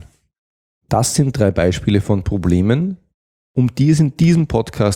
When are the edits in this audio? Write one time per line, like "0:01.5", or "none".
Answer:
none